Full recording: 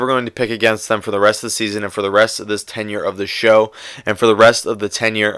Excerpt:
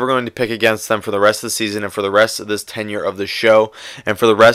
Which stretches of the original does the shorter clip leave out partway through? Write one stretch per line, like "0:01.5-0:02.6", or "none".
none